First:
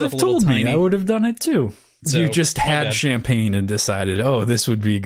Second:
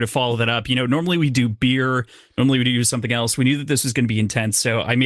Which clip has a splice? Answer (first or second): first